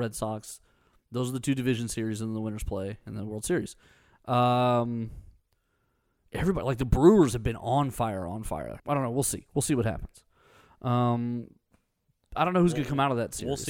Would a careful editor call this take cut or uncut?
cut